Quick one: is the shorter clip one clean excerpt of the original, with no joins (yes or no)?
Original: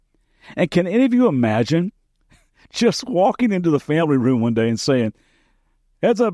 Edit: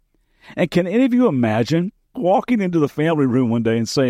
no